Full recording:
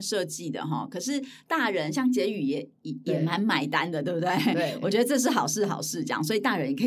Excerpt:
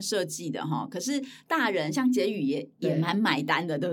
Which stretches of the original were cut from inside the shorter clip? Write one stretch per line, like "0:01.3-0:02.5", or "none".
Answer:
0:02.8-0:03.0

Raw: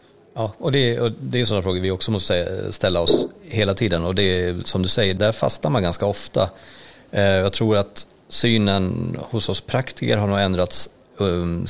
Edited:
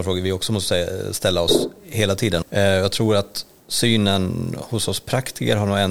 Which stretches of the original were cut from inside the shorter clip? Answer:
0:04.0-0:07.0

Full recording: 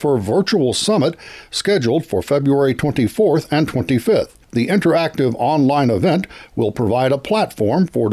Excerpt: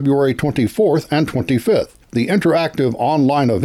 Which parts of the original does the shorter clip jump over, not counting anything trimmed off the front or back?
none

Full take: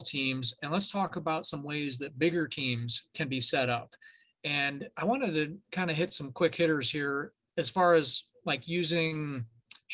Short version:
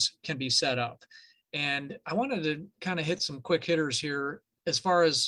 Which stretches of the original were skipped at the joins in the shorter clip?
none

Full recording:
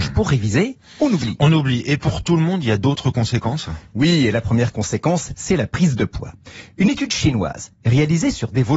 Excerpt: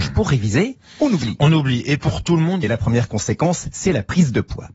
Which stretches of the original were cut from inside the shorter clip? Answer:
0:02.6-0:04.3

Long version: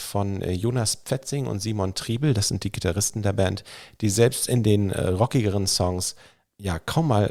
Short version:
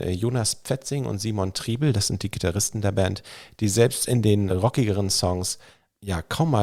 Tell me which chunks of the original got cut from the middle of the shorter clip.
0:04.9-0:05.1

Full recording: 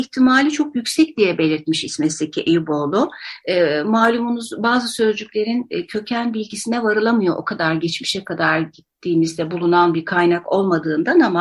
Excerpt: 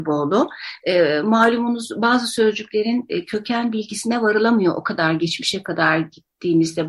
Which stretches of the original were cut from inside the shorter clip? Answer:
none

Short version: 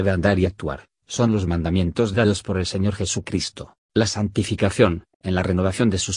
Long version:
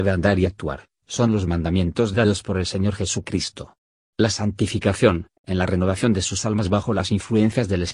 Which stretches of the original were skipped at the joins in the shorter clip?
0:03.8-0:04.0

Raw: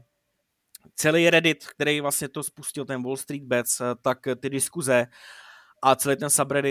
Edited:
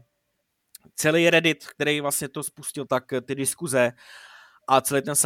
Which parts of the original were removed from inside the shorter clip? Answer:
0:02.9-0:04.0

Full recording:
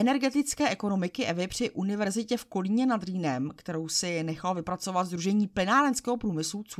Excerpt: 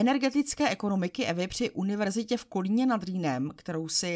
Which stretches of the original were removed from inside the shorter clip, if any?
none

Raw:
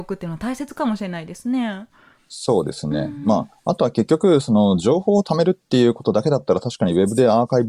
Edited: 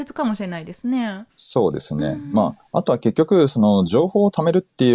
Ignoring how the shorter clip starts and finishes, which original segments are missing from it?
0:01.9-0:02.2

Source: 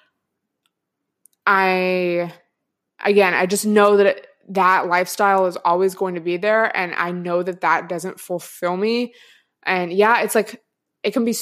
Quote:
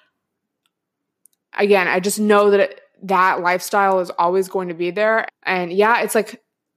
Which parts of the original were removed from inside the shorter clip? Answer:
0:01.4-0:02.8
0:06.7-0:09.5

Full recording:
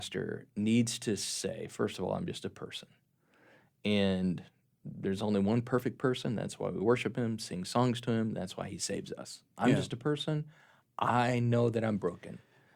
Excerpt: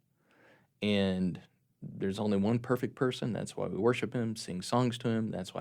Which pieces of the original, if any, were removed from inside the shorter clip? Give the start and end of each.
none

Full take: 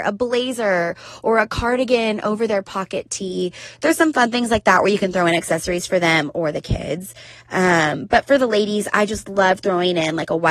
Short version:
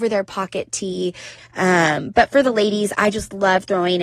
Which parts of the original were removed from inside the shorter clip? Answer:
0:03.8-0:07.3

